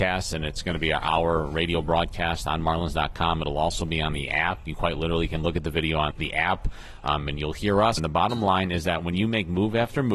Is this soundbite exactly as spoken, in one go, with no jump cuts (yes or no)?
no